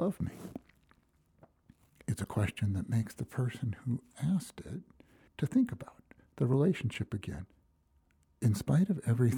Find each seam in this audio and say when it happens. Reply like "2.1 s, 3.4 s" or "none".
5.3 s